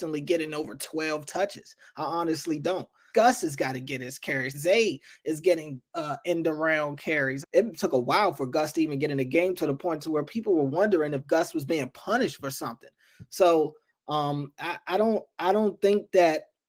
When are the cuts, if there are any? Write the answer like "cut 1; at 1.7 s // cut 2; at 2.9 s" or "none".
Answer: cut 1; at 3.1 s // cut 2; at 4.5 s // cut 3; at 7.4 s